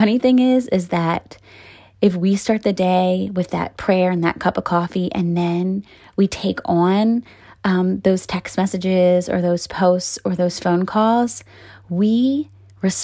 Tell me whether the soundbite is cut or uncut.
uncut